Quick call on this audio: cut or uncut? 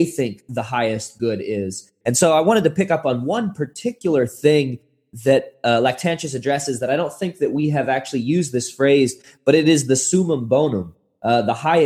cut